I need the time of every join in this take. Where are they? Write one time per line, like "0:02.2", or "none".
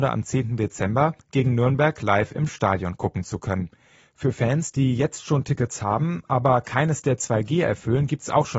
none